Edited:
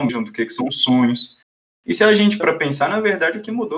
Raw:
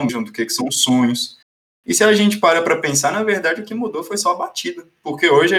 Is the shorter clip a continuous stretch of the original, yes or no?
no